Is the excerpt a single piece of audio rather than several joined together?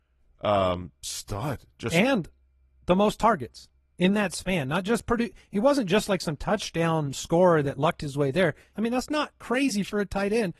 no; 1 cut; at 8.7 s

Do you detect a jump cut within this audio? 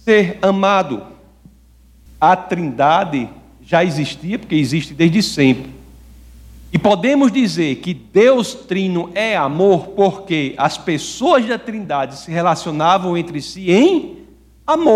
yes; 1 cut; at 2.1 s

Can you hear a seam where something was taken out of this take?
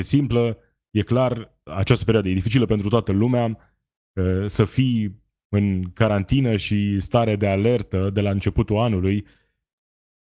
yes; 1 cut; at 1.7 s

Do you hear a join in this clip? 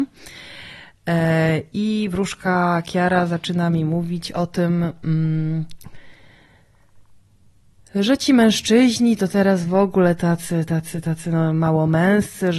no; 0 cuts

